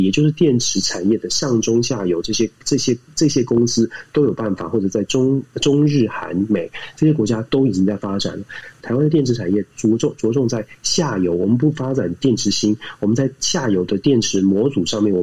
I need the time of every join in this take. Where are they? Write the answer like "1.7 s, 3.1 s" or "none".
8.8 s

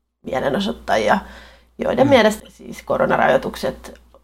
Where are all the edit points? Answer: 2.4 s

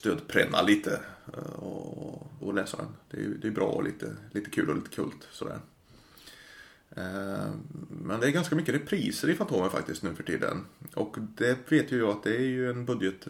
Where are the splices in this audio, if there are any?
2.4 s

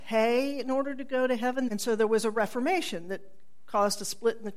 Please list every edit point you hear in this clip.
1.7 s

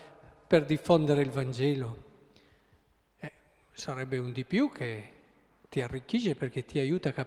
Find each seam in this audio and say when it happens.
none

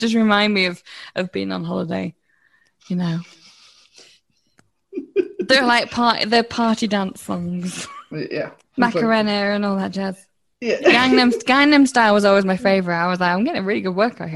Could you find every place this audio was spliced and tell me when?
8.1 s

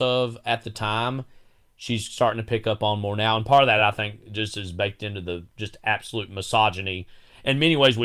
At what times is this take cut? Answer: none

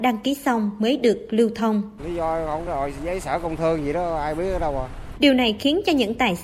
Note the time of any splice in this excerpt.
2.0 s, 5.1 s

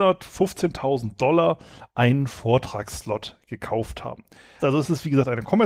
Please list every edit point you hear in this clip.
4.6 s

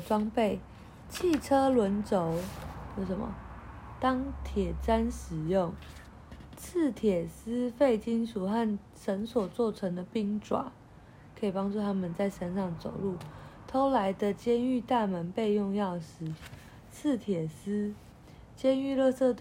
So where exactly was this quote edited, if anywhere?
none

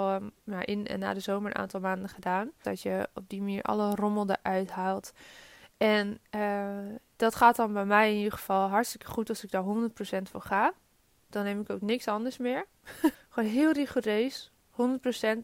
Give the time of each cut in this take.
2.6 s, 13.1 s

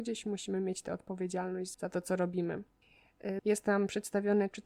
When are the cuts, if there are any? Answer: 1.7 s, 3.4 s

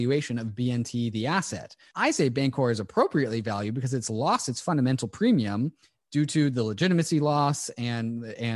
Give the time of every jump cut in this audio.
1.9 s

